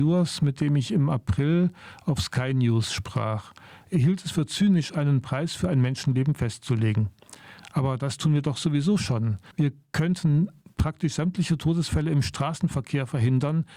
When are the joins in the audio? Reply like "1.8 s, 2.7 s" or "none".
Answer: 9.5 s